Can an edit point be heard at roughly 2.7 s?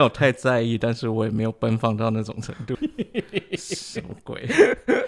yes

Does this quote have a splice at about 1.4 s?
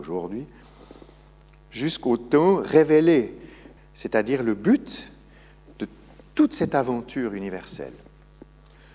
no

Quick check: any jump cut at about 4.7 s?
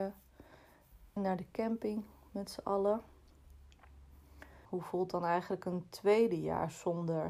yes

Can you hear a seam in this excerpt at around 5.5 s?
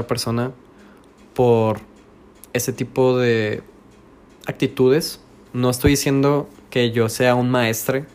yes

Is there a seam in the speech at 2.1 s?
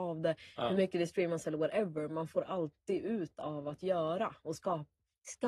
no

